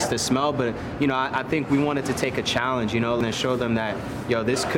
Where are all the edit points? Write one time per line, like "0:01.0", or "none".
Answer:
none